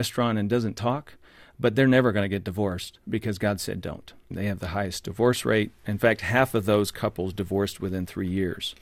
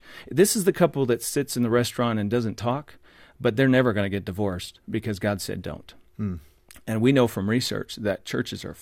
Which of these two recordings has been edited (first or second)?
first